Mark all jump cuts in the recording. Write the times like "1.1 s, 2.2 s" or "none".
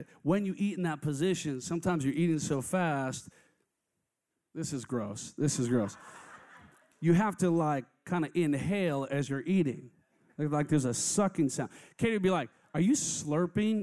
none

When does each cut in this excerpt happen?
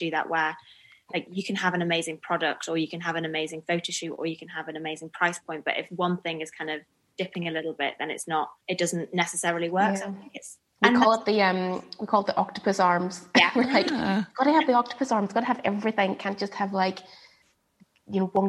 8.6 s

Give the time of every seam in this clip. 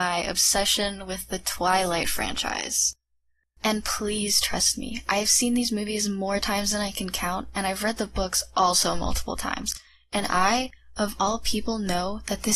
3.6 s

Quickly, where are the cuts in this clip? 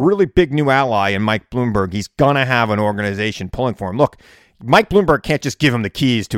none

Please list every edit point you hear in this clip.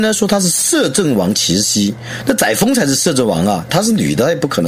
3.7 s

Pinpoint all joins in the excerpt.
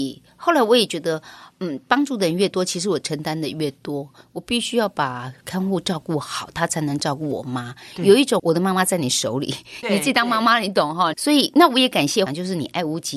11.1 s, 12.3 s

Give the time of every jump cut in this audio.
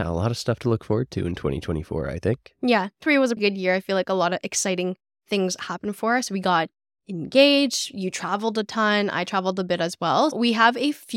3.4 s

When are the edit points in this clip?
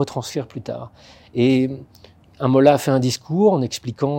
none

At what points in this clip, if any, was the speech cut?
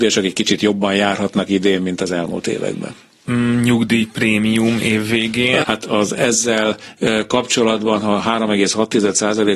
5.6 s

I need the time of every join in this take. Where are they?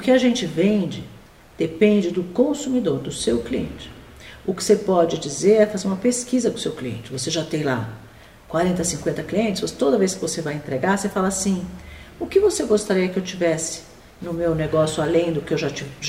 none

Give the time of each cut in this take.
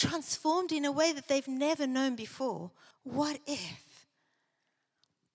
2.9 s

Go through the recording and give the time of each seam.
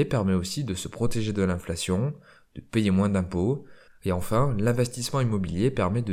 3.9 s

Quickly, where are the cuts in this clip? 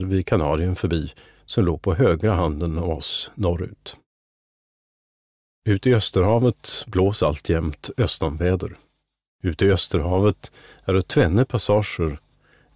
none

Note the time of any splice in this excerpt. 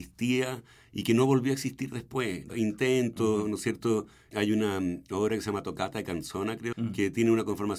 2.5 s, 6.7 s

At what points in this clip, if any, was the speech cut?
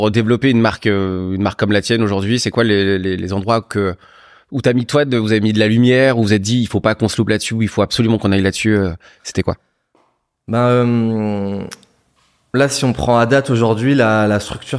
none

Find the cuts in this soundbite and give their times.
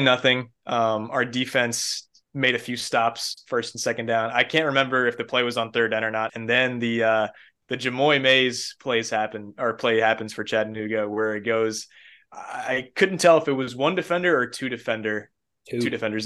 6.3 s

